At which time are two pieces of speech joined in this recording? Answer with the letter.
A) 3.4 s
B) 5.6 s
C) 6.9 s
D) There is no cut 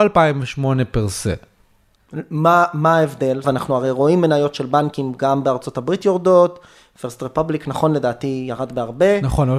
A